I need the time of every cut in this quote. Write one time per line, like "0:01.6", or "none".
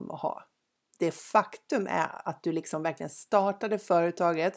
0:00.9